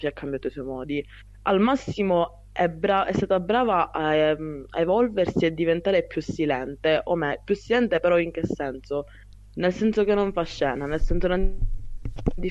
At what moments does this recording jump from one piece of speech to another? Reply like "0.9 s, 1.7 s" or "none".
none